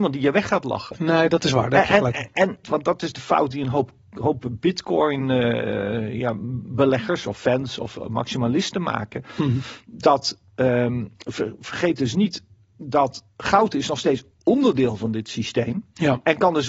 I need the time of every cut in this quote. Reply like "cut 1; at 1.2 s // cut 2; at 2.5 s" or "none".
cut 1; at 2.6 s